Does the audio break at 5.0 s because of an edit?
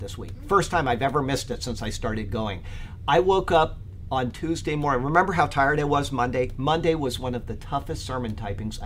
no; 0 cuts

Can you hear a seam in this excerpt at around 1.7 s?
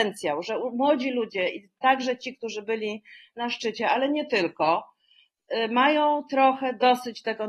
no; 0 cuts

